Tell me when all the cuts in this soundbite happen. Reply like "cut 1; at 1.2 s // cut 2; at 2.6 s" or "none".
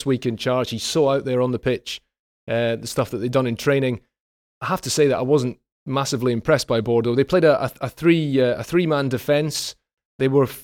none